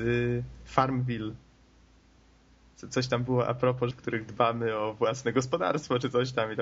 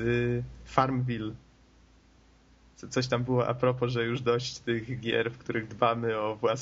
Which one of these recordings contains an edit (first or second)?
first